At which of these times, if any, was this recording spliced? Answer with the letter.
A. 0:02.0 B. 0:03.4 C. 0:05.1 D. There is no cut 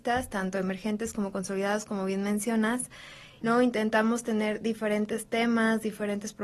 B